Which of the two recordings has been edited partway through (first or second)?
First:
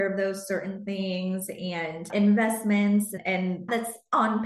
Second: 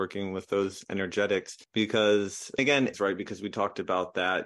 second